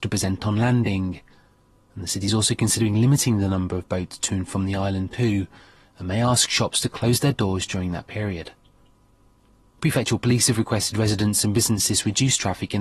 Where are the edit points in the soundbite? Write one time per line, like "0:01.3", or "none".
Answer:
none